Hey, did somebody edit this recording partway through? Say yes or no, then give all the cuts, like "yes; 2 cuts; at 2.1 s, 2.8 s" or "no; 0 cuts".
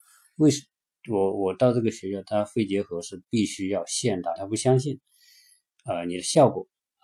yes; 1 cut; at 4.4 s